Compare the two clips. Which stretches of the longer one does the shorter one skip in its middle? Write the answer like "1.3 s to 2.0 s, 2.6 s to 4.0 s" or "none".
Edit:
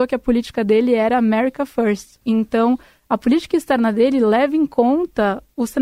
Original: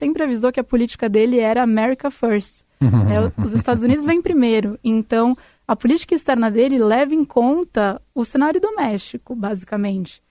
2.7 s to 4.8 s